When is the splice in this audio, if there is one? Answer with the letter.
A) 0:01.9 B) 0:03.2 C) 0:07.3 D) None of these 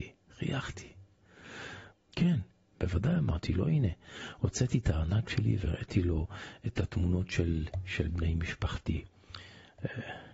A